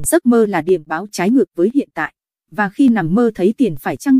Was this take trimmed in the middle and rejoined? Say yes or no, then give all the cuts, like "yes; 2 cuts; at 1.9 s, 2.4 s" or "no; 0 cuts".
no; 0 cuts